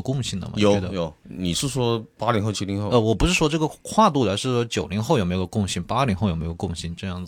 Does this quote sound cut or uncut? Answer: cut